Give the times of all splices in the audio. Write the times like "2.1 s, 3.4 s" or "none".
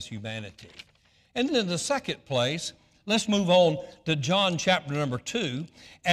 1.5 s